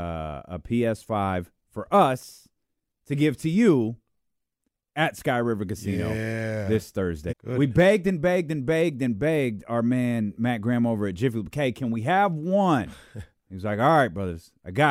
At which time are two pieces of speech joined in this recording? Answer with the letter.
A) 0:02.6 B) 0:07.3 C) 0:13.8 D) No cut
B